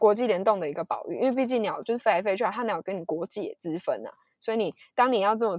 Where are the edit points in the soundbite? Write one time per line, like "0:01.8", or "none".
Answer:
none